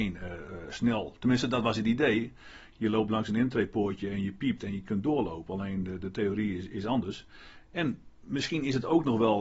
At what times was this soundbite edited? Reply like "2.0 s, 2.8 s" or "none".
none